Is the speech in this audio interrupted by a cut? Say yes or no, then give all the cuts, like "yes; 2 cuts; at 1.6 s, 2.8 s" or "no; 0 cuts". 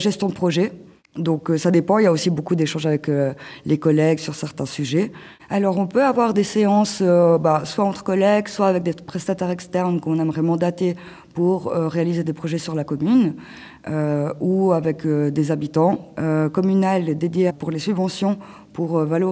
yes; 2 cuts; at 16.2 s, 17.5 s